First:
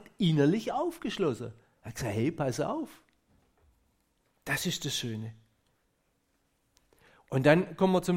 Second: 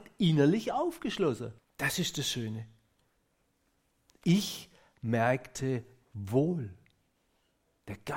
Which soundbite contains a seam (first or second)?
second